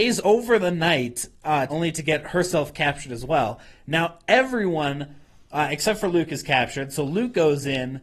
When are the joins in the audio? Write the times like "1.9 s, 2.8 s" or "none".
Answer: 1.7 s